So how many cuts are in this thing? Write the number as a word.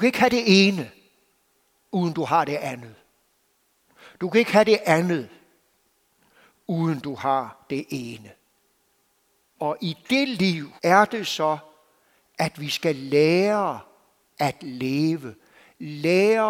two